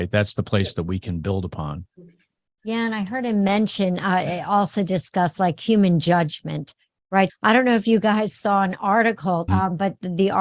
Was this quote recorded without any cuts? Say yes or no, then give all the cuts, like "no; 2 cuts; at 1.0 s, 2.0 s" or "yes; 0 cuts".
no; 2 cuts; at 7.3 s, 9.5 s